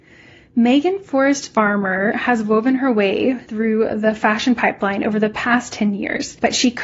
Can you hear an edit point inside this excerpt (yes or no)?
no